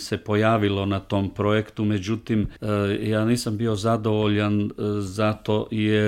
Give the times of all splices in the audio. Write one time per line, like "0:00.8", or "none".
0:02.6